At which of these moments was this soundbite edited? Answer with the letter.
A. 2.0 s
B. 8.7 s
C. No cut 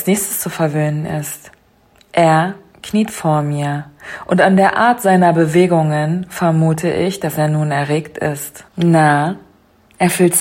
B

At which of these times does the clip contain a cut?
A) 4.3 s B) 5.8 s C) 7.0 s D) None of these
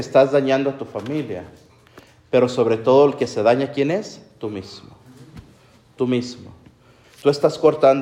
C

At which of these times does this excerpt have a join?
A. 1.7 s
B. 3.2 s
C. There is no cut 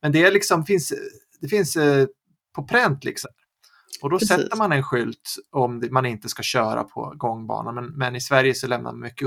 B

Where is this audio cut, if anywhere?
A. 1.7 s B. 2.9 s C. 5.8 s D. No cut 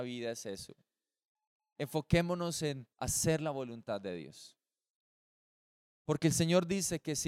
B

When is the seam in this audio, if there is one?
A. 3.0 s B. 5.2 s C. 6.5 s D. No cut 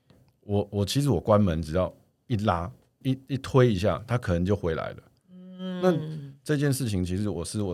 A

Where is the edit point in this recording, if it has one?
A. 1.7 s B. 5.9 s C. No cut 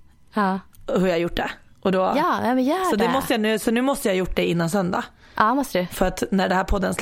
C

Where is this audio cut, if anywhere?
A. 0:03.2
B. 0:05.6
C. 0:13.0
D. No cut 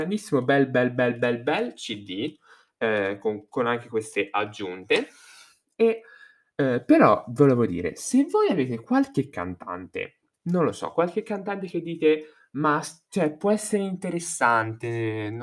D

